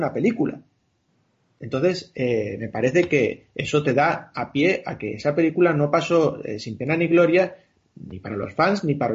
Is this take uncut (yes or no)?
yes